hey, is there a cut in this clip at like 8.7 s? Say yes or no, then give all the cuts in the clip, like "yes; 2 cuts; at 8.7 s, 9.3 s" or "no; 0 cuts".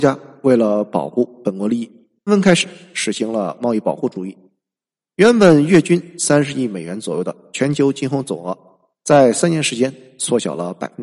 no; 1 cut; at 2.3 s